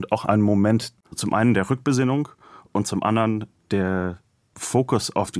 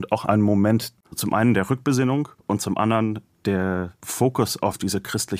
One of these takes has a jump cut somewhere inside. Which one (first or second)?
second